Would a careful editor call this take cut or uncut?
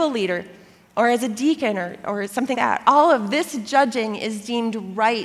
cut